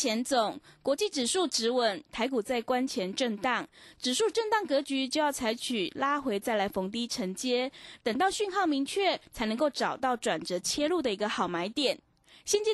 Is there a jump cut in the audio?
no; 0 cuts

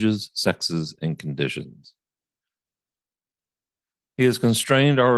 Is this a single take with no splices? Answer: no; 1 cut; at 4.0 s

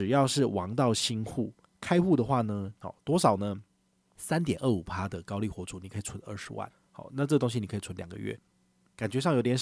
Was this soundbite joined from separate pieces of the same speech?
yes; 1 cut; at 2.8 s

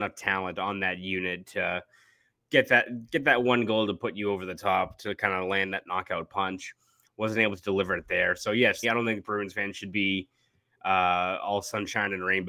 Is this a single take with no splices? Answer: no; 1 cut; at 8.8 s

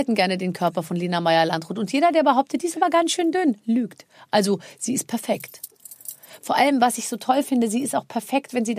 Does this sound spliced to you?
no; 0 cuts

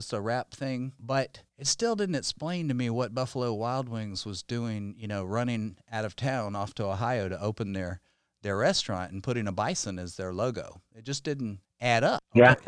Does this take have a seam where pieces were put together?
yes; 1 cut; at 1.5 s

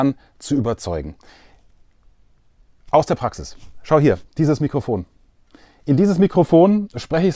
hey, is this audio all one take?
yes; 0 cuts

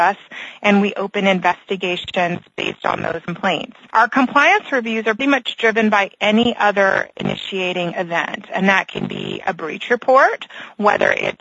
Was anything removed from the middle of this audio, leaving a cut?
yes; 1 cut; at 5.2 s

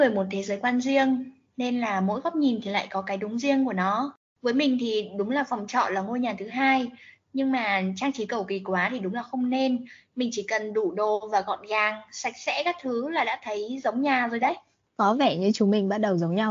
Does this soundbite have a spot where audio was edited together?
no; 0 cuts

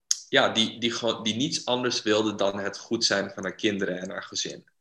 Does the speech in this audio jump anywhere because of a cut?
no; 0 cuts

